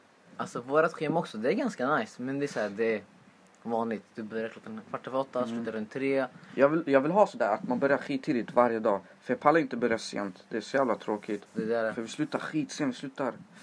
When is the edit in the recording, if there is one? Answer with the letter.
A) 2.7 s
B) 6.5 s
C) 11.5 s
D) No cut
C